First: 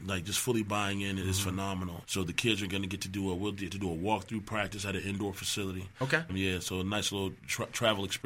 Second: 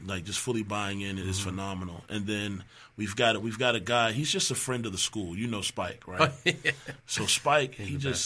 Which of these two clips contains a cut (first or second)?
first